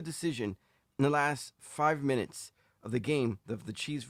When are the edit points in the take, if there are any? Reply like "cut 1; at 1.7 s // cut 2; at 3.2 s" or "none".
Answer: none